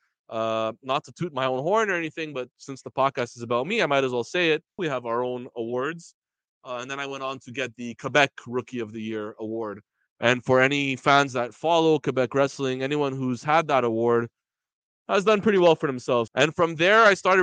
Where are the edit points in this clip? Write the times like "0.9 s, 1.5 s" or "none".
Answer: 4.8 s, 16.3 s